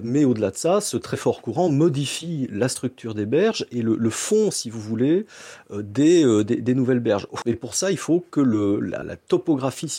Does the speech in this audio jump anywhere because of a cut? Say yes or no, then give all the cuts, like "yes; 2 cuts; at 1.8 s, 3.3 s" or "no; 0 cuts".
yes; 2 cuts; at 7.4 s, 9.0 s